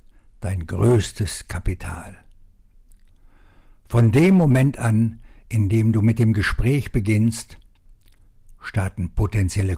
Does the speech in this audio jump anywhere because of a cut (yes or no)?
no